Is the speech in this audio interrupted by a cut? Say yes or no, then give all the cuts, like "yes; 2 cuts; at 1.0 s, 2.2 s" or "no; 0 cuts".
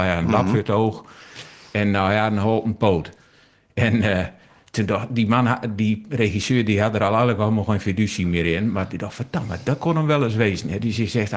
no; 0 cuts